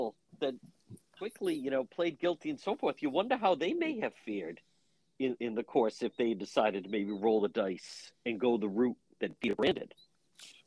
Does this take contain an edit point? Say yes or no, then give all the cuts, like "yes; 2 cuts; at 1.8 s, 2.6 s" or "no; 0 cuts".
no; 0 cuts